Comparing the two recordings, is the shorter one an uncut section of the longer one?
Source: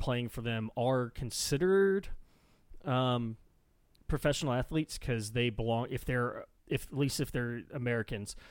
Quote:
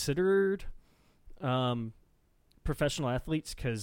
yes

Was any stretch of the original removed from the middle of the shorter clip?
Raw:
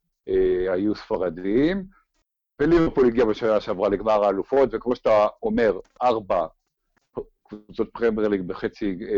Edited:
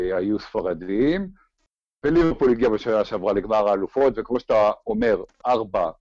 no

